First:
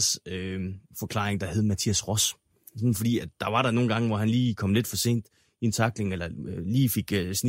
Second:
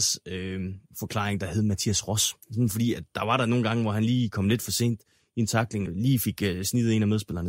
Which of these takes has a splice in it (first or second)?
second